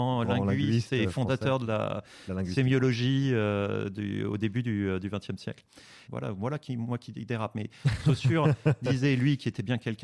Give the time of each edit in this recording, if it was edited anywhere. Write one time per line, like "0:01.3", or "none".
0:06.1